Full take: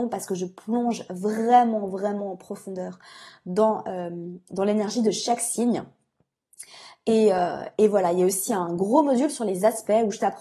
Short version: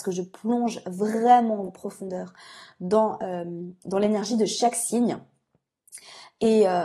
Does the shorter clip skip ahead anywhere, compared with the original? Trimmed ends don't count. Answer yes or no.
yes